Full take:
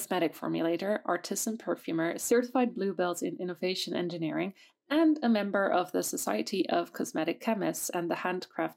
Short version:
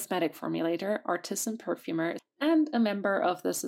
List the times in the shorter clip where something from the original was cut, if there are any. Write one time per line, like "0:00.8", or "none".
0:02.2